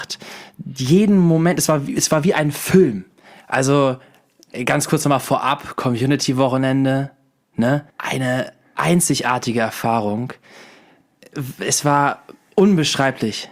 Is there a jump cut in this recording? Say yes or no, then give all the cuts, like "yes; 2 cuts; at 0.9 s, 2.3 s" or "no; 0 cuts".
yes; 2 cuts; at 3.4 s, 7.9 s